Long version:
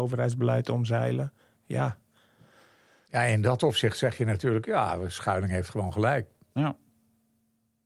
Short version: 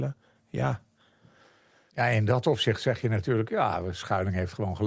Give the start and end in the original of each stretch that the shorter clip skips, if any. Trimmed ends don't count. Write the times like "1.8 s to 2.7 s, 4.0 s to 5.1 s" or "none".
none